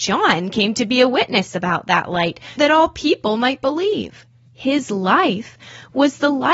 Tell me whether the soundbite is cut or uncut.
cut